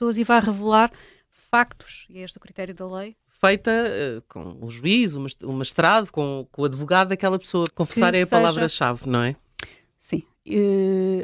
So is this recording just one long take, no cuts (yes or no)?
no